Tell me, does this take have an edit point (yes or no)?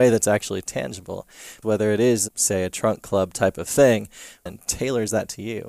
yes